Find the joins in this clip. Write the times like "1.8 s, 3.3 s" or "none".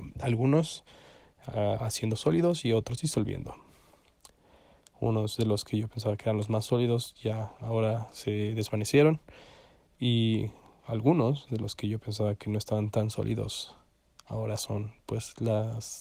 none